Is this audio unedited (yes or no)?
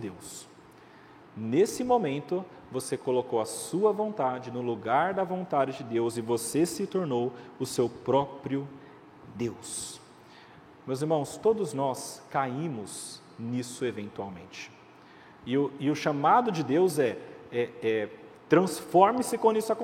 yes